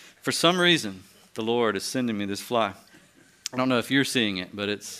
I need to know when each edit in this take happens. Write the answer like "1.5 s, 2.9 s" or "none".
none